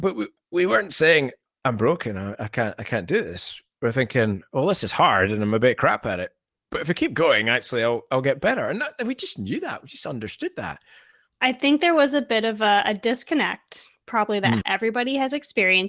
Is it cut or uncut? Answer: cut